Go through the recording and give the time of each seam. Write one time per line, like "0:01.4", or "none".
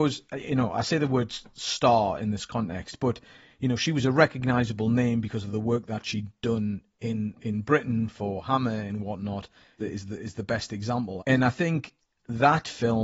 0:09.8
0:11.2